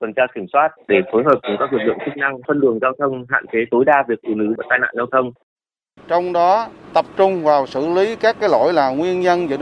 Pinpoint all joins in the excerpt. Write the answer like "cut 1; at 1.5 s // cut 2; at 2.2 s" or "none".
cut 1; at 6.0 s

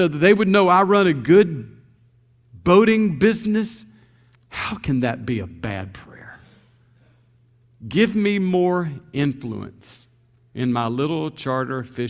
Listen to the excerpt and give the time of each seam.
cut 1; at 4.3 s

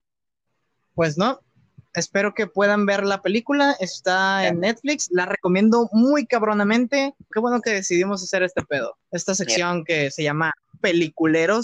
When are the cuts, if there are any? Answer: cut 1; at 7.3 s // cut 2; at 9.0 s

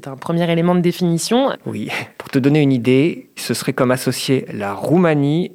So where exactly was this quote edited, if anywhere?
cut 1; at 1.5 s // cut 2; at 3.4 s

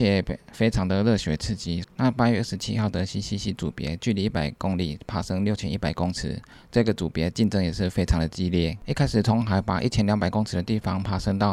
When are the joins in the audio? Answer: cut 1; at 1.8 s

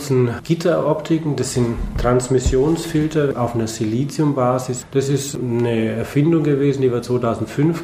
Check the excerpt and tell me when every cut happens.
none

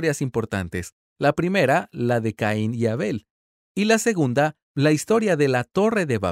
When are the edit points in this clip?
none

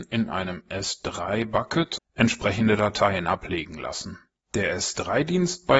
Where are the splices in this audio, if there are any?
cut 1; at 2.0 s

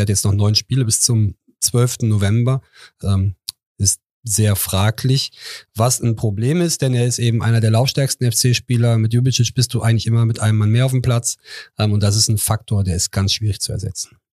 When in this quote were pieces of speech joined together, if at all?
cut 1; at 3.0 s

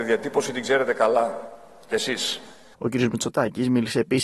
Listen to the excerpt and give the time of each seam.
cut 1; at 2.7 s

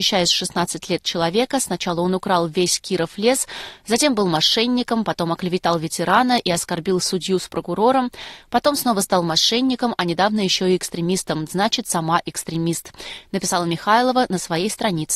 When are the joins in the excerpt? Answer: none

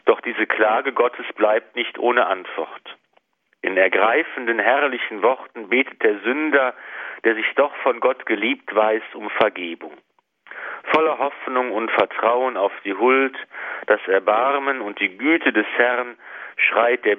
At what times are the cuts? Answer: none

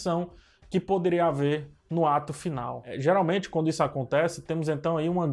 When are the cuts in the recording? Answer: none

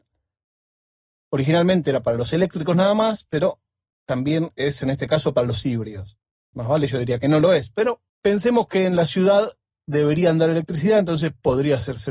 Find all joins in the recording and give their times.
cut 1; at 6.5 s // cut 2; at 8.1 s

